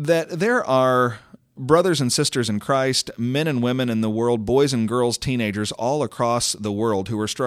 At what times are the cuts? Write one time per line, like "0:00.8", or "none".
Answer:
none